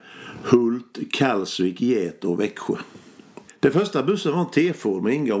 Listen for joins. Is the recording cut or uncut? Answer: cut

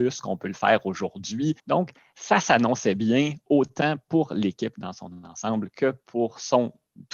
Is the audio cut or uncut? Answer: cut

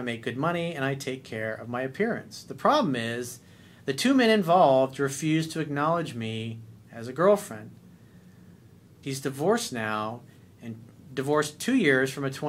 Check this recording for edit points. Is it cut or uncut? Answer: cut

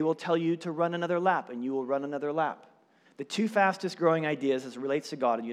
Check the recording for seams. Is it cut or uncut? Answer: cut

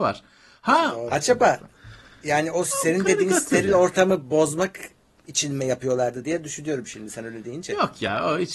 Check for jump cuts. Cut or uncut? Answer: cut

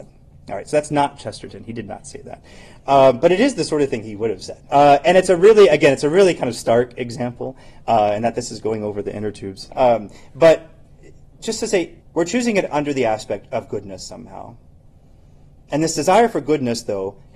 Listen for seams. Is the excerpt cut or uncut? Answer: cut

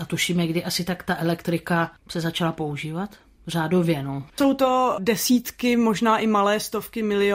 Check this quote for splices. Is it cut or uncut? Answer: uncut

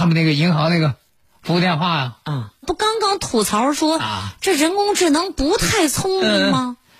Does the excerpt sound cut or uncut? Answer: cut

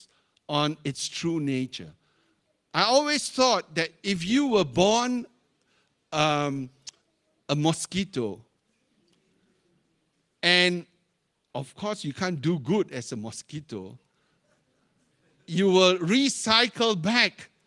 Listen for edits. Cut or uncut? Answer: uncut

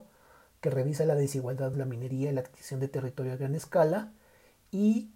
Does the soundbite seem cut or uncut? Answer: cut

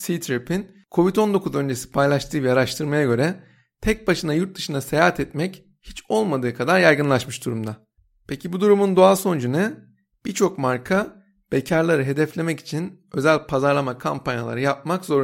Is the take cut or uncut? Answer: uncut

